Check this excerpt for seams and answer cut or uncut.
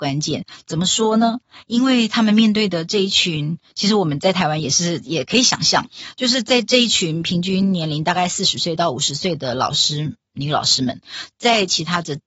uncut